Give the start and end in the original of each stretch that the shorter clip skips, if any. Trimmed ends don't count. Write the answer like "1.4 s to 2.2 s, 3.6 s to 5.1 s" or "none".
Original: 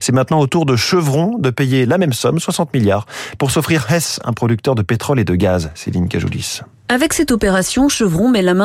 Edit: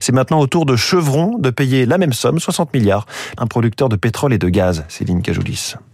3.4 s to 4.2 s